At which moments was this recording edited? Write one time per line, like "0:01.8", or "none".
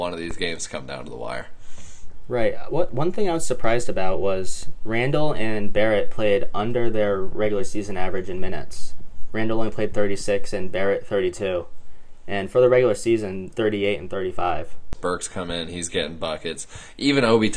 0:13.5
0:14.9

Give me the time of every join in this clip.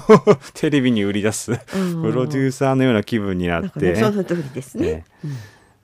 0:03.9

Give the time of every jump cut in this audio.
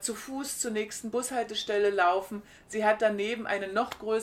none

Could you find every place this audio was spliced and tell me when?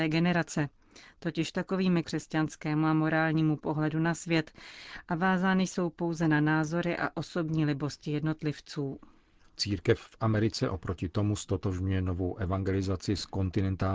0:02.0

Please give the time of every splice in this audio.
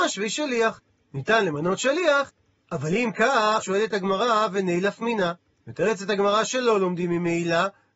0:02.6
0:03.6
0:05.6

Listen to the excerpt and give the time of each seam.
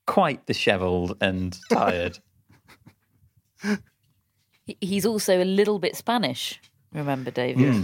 none

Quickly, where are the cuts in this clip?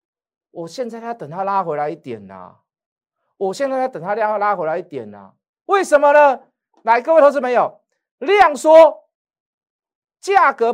none

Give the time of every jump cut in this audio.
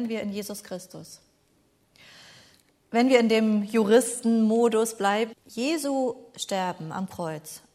0:05.3

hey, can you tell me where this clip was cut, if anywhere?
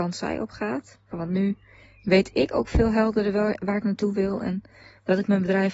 0:01.1

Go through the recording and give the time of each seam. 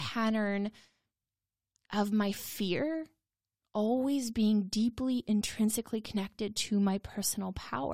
none

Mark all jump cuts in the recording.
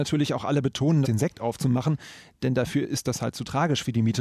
0:01.0

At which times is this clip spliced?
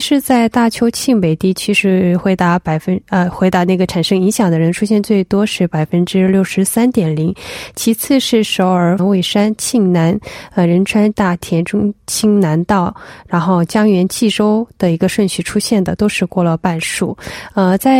0:09.0
0:11.1

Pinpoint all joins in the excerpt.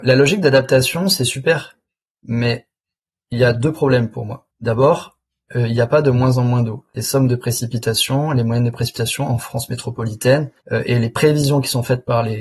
0:04.5
0:10.6

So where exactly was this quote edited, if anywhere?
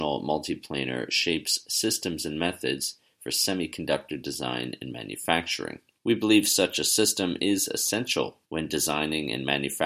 0:06.0
0:08.4

